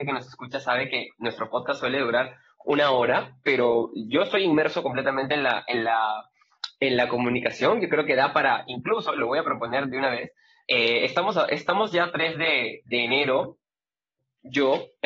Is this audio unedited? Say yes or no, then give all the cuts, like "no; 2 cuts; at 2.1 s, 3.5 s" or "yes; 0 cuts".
yes; 0 cuts